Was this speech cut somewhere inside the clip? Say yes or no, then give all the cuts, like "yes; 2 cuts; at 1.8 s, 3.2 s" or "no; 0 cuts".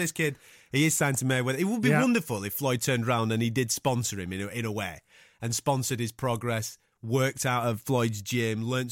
no; 0 cuts